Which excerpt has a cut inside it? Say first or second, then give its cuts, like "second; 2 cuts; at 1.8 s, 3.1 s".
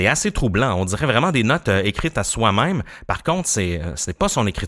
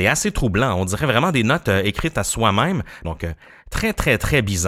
second; 1 cut; at 3.0 s